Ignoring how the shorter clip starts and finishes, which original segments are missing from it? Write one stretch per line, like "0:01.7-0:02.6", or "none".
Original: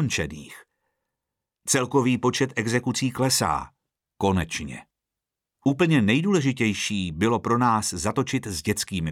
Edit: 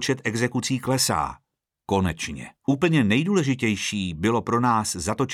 0:04.9-0:05.5